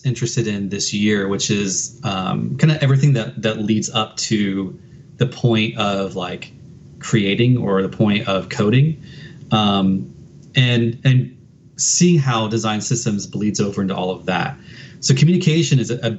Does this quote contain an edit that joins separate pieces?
no; 0 cuts

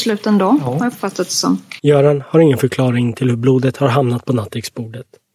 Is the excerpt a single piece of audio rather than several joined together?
no; 1 cut; at 1.8 s

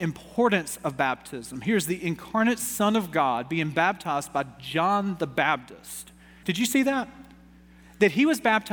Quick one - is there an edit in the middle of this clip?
yes; 1 cut; at 6.4 s

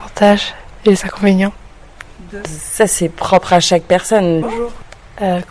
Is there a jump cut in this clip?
yes; 2 cuts; at 2.4 s, 4.4 s

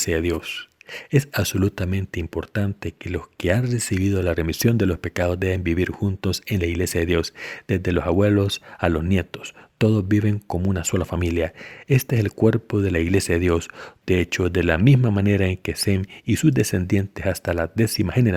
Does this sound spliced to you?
yes; 2 cuts; at 11.9 s, 14.0 s

